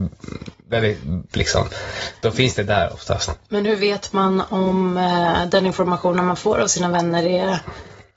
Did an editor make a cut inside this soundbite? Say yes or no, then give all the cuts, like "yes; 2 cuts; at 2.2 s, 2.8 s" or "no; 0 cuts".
yes; 1 cut; at 1.3 s